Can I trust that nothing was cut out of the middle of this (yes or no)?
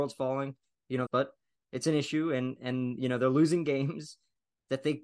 no